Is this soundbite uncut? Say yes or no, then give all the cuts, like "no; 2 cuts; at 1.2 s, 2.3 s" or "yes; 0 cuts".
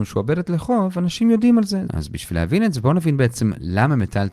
no; 1 cut; at 1.9 s